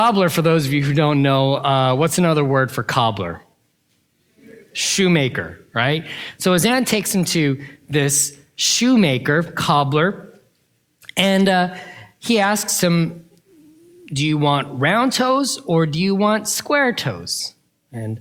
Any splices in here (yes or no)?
no